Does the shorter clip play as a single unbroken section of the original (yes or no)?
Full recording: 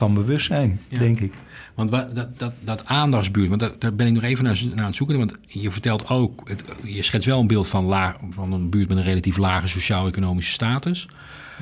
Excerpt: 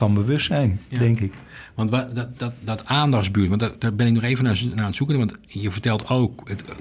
yes